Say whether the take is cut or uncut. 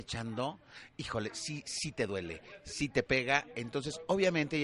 uncut